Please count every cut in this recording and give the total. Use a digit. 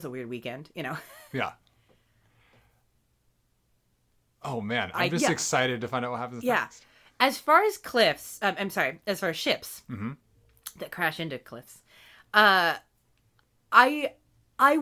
0